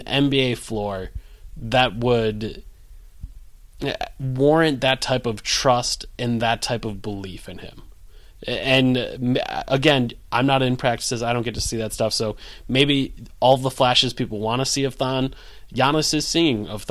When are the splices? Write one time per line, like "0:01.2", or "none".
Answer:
none